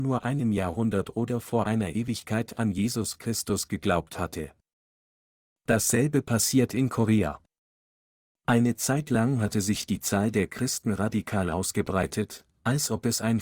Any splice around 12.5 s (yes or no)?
no